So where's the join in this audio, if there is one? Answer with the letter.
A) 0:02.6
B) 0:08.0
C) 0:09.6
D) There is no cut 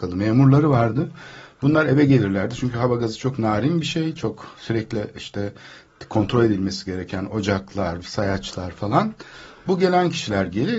B